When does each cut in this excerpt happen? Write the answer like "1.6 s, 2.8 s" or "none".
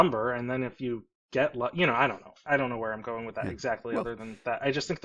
none